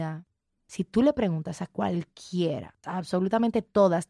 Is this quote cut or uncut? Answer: cut